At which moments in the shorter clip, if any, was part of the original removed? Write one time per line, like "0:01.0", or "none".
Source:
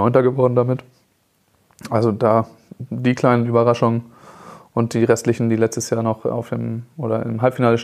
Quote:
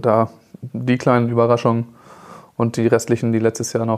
none